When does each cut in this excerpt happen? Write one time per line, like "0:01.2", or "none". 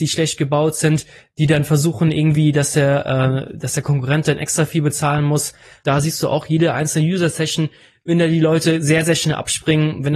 0:05.8